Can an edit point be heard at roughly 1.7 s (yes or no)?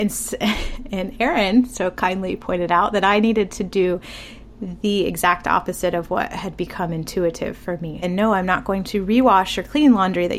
no